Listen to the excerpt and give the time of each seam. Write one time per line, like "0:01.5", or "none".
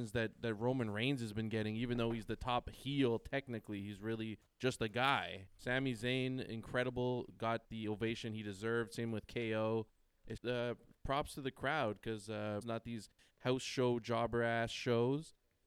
0:05.5
0:10.4
0:12.6